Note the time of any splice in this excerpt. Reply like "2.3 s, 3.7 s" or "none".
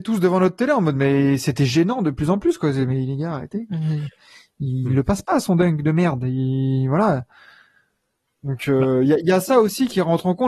none